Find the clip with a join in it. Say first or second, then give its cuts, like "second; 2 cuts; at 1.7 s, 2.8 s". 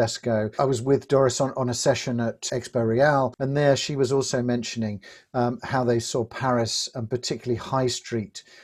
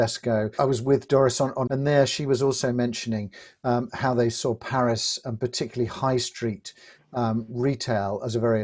second; 1 cut; at 1.7 s